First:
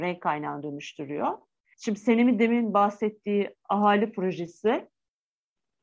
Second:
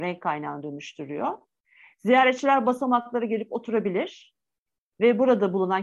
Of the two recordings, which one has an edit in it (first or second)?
first